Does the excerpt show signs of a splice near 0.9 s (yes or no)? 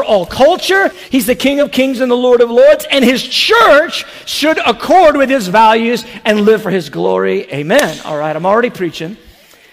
yes